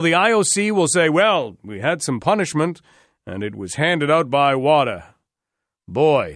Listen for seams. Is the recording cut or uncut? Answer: uncut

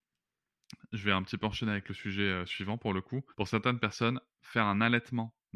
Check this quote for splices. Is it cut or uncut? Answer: cut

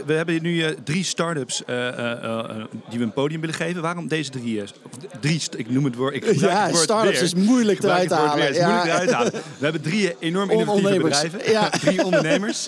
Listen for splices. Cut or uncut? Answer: uncut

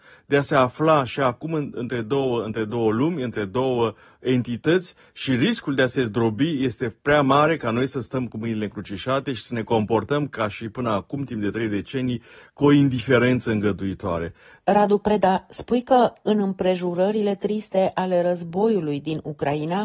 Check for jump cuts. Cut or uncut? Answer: cut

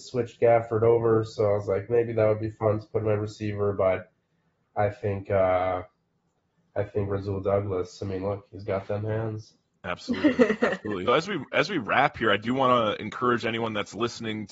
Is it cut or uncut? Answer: cut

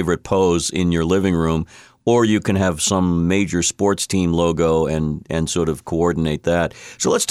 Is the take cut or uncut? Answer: uncut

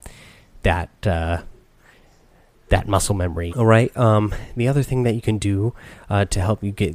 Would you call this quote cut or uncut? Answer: cut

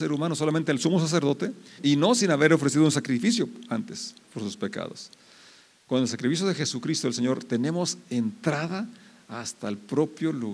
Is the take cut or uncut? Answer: cut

